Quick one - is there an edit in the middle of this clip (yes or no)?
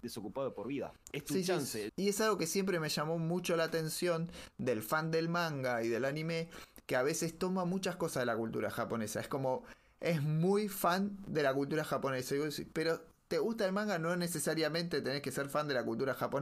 yes